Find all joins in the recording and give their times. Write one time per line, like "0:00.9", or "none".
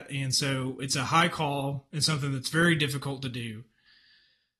none